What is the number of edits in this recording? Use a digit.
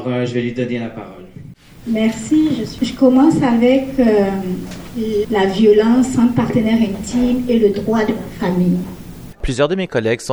2